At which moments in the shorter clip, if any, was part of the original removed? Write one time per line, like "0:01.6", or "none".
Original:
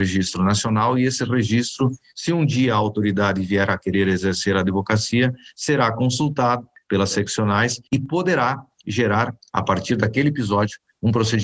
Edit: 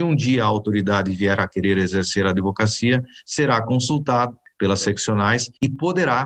none

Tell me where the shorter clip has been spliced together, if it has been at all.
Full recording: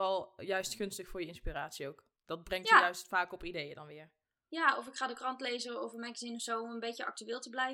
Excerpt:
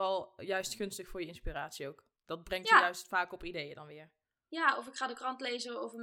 none

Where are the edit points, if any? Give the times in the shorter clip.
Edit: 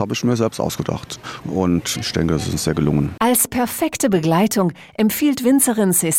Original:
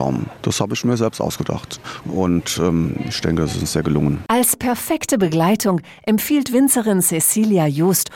0:01.9

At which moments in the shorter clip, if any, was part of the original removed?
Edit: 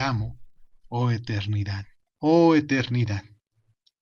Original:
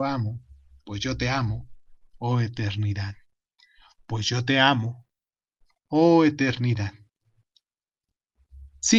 0:02.1

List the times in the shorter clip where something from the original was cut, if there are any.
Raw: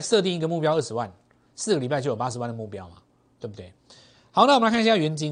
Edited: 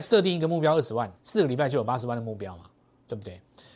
0:01.2

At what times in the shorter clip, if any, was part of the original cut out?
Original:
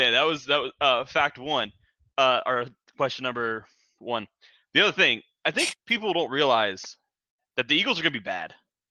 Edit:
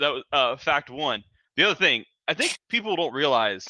0:01.4

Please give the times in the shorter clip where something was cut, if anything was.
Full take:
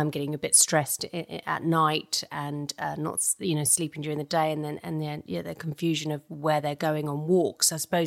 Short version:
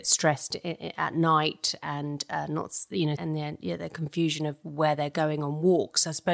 0:03.1

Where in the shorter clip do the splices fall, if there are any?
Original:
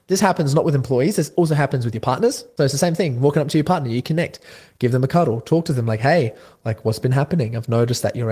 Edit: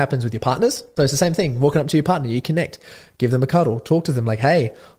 none

